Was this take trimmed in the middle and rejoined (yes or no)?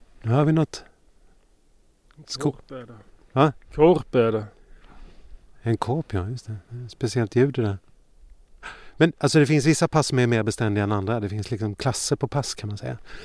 no